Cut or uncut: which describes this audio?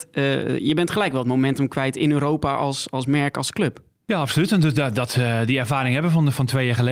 uncut